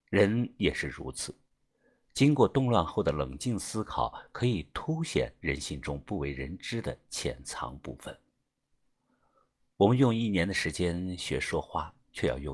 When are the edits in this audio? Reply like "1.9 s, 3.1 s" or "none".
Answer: none